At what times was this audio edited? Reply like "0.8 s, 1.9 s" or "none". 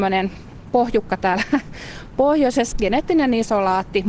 2.7 s